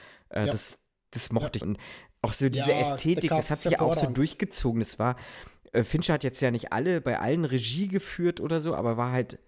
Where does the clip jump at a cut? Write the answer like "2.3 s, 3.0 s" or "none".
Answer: 1.6 s